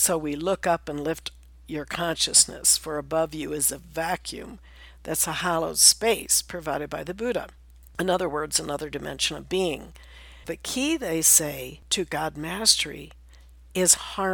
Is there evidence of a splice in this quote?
yes; 1 cut; at 10.4 s

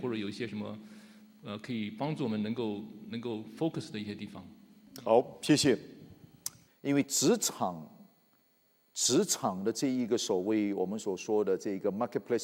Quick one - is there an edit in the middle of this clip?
yes; 2 cuts; at 4.9 s, 6.7 s

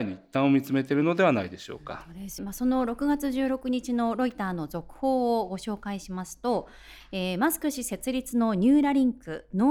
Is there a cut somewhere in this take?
yes; 1 cut; at 2.4 s

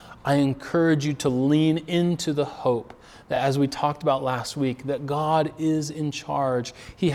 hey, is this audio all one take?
yes; 0 cuts

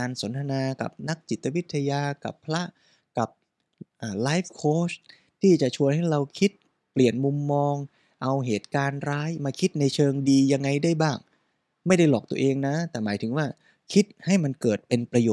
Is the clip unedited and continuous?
yes; 0 cuts

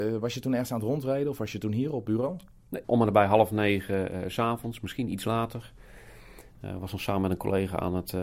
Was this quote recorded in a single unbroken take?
no; 1 cut; at 2.8 s

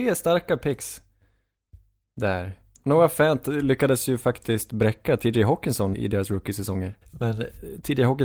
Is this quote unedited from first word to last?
no; 2 cuts; at 5.9 s, 7.0 s

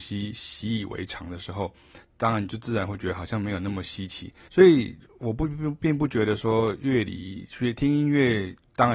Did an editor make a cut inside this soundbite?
yes; 1 cut; at 4.5 s

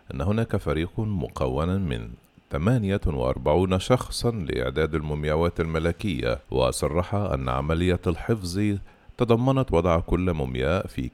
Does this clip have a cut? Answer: yes; 1 cut; at 6.4 s

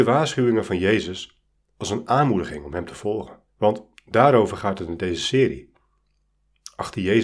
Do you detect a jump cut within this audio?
yes; 1 cut; at 3.5 s

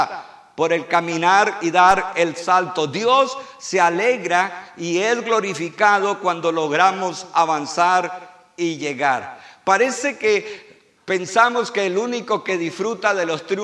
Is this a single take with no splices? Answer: yes; 0 cuts

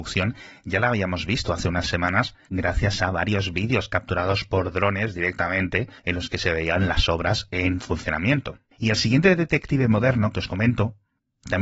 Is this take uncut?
no; 1 cut; at 8.7 s

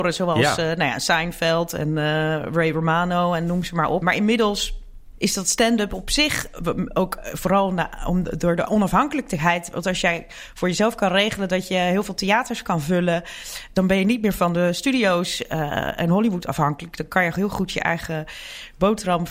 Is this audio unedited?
no; 1 cut; at 4.0 s

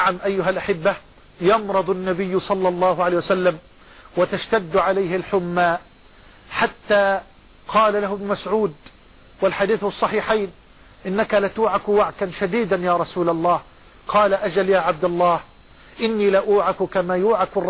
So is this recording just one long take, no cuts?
yes; 0 cuts

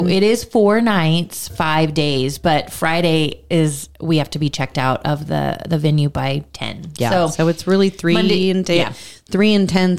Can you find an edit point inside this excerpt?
no; 0 cuts

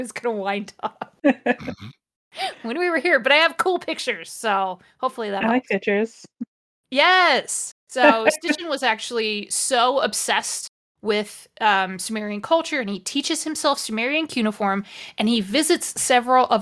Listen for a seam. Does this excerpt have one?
no; 0 cuts

